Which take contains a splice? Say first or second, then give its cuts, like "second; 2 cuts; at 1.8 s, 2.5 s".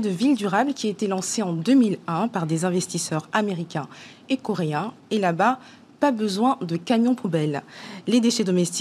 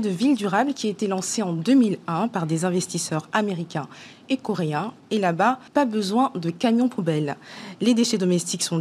second; 1 cut; at 5.7 s